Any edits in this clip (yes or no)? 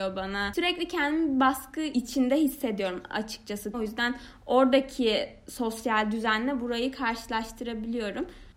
yes